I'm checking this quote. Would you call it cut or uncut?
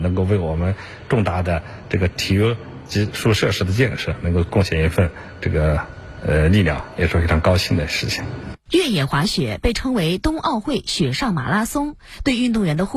uncut